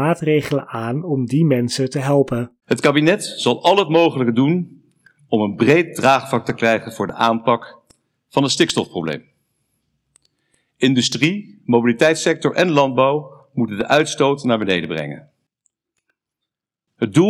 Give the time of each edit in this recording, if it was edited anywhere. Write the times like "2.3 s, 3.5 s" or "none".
2.6 s